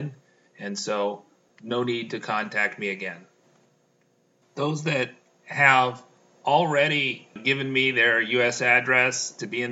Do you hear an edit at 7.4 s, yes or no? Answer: yes